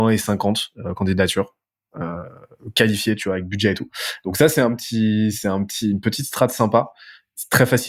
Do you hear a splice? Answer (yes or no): no